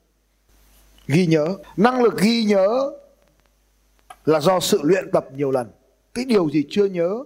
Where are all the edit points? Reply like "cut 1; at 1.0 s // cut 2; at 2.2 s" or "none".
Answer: none